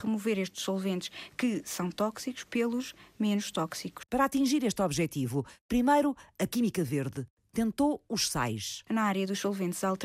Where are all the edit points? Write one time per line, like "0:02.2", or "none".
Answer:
none

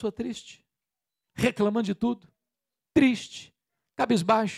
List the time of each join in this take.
0:01.3

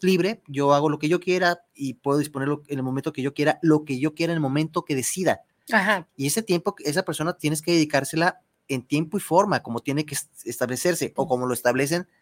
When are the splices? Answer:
0:06.1
0:11.2

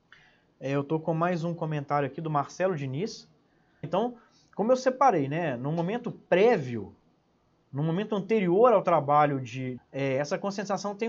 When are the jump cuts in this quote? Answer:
0:03.8
0:09.8

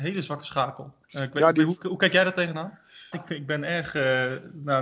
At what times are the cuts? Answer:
0:01.0
0:03.1

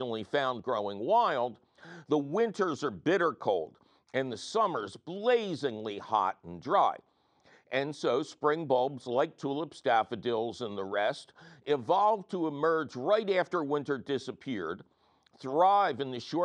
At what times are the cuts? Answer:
none

